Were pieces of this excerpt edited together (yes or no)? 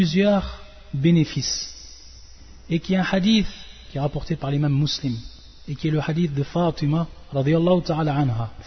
no